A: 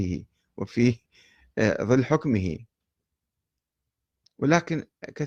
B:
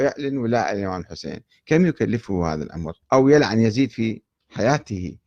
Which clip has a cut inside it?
B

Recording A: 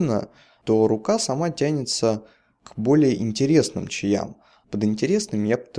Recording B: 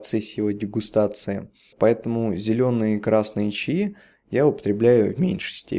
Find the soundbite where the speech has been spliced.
B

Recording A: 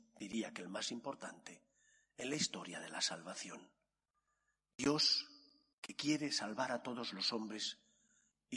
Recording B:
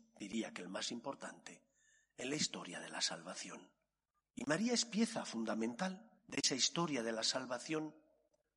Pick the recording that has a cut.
B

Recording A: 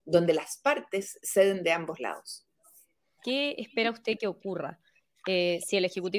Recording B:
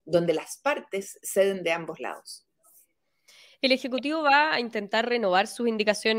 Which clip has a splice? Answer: A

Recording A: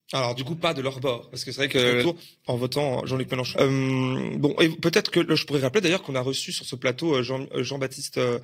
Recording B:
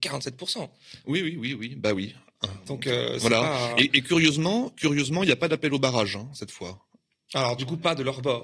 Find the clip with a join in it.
A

